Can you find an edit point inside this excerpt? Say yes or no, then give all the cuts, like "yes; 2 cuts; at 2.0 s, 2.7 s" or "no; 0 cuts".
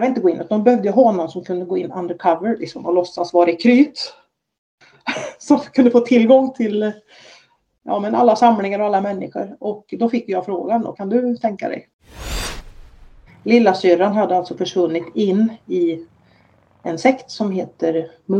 yes; 2 cuts; at 10.9 s, 13.3 s